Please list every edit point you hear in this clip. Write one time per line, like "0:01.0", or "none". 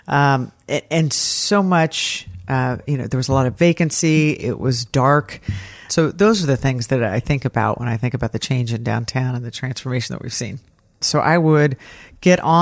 0:04.4
0:05.9
0:11.0